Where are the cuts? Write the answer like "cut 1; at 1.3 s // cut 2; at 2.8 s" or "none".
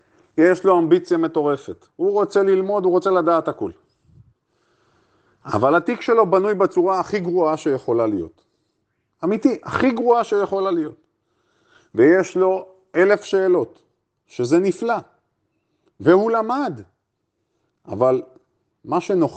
none